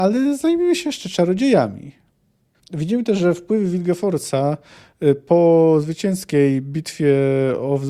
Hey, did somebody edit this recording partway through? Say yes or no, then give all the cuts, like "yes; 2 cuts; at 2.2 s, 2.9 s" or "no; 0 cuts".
yes; 1 cut; at 2.5 s